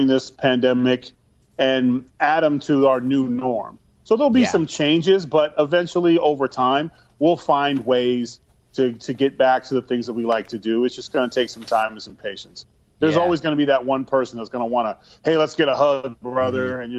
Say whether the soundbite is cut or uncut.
uncut